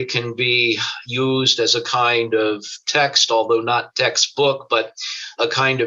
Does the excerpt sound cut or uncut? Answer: uncut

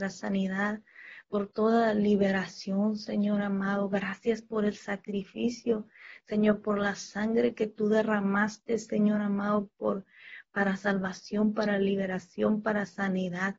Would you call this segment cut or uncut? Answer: uncut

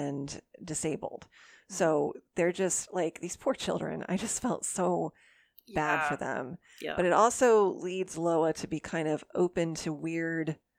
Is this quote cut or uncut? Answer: uncut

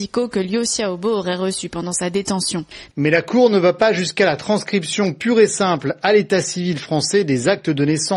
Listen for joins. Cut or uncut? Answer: cut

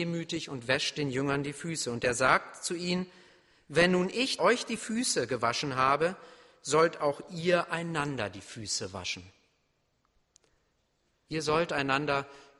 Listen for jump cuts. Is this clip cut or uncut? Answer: cut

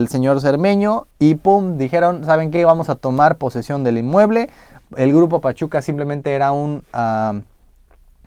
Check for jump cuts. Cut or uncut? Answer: uncut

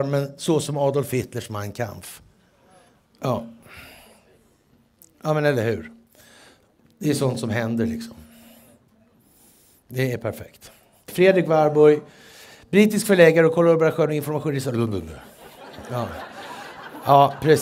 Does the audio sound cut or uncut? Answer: cut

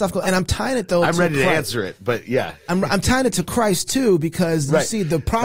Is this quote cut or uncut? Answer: uncut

